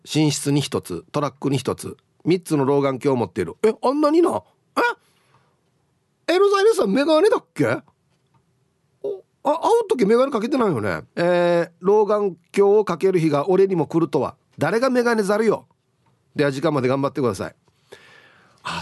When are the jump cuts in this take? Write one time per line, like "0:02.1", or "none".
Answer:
0:11.1
0:14.5